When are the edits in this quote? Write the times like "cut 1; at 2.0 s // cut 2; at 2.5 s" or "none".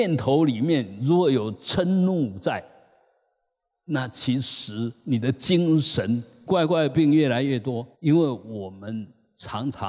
cut 1; at 6.5 s // cut 2; at 7.9 s